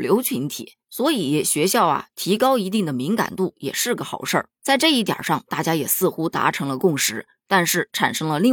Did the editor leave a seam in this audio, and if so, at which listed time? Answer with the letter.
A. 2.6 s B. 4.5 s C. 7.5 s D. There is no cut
B